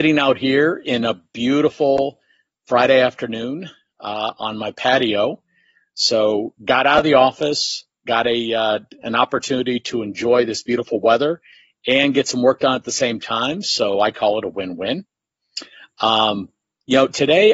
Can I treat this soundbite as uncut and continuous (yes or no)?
yes